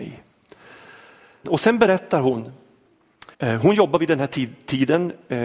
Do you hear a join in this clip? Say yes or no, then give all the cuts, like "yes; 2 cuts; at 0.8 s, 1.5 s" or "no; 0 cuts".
yes; 2 cuts; at 1.4 s, 3.3 s